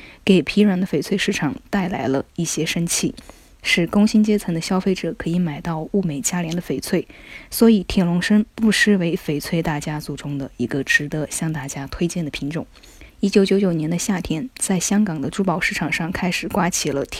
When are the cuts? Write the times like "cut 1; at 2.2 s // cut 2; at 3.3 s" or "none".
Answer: cut 1; at 13.1 s